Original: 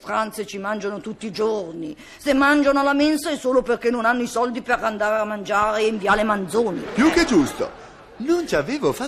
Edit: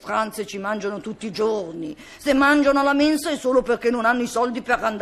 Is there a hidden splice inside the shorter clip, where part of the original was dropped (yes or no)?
no